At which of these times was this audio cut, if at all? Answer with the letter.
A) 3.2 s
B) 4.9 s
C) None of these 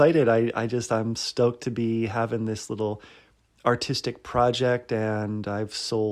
C